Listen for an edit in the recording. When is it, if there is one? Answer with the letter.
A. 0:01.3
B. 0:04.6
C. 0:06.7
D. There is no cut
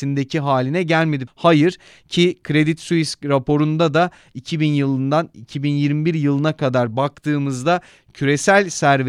A